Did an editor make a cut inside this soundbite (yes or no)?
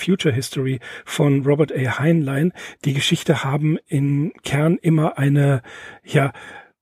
no